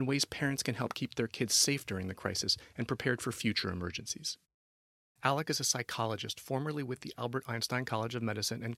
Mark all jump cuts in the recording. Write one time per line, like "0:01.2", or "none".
0:05.2

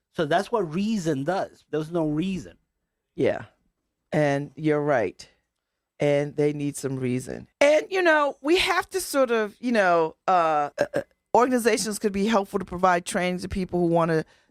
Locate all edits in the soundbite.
0:07.5
0:10.7

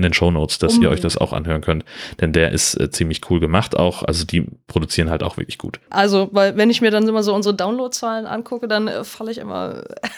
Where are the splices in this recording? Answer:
0:05.9

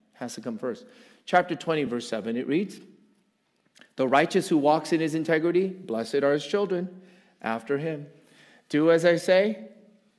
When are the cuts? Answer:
none

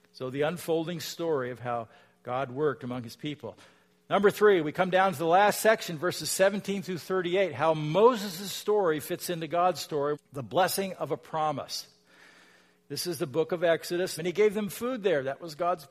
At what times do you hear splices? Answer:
0:10.1
0:14.2

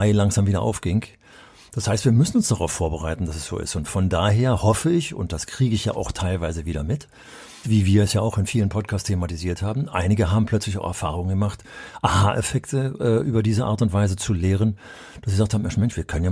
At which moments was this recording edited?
0:07.6

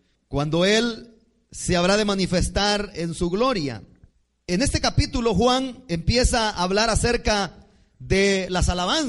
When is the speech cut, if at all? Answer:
none

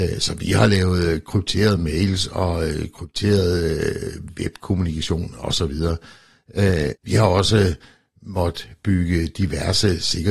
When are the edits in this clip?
0:07.0

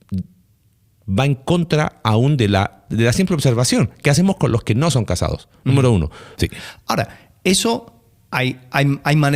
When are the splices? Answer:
0:06.3

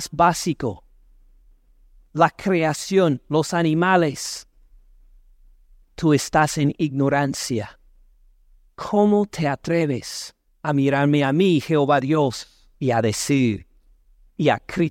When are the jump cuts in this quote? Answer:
0:12.7

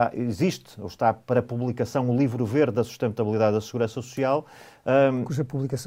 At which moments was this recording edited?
none

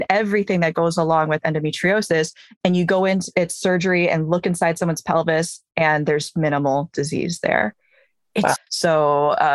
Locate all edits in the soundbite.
0:08.6

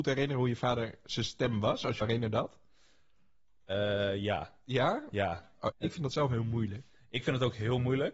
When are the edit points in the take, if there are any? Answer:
0:02.0
0:05.7

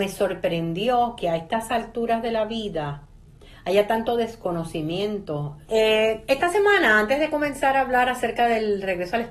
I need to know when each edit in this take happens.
0:05.7

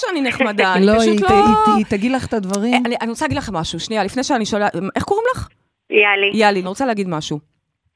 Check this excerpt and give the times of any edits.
0:06.6

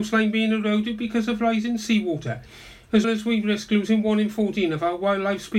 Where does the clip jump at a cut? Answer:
0:03.0

